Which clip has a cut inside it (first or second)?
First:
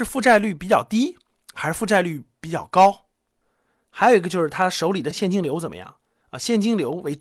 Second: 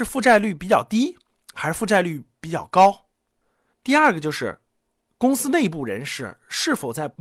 second